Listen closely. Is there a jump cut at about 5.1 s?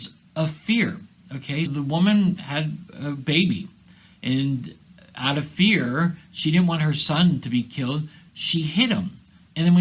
no; 1 cut; at 1.7 s

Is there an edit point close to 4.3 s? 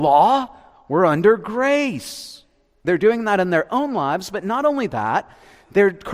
no; 1 cut; at 2.9 s

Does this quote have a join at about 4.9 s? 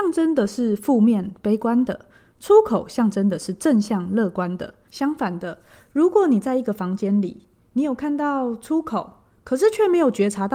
yes; 1 cut; at 4.9 s

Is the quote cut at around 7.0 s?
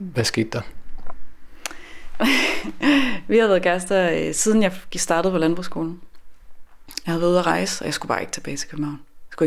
yes; 1 cut; at 7.0 s

